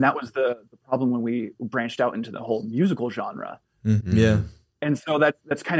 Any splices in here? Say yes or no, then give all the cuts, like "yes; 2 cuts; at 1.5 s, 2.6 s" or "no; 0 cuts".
yes; 1 cut; at 4.0 s